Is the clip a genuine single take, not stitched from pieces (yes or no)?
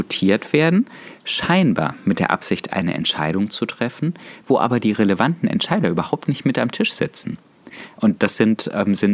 yes